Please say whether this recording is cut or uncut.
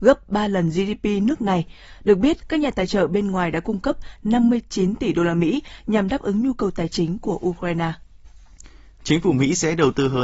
cut